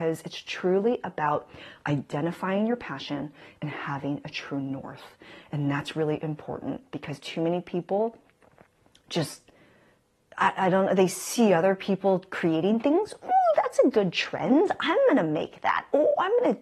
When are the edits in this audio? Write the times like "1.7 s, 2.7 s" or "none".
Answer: none